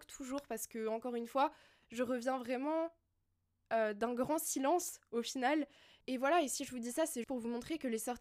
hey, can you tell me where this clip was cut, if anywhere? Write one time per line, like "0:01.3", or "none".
0:07.2